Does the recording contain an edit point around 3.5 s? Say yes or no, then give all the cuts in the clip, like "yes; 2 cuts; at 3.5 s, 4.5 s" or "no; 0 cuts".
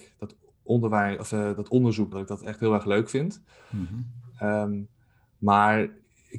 no; 1 cut; at 2.1 s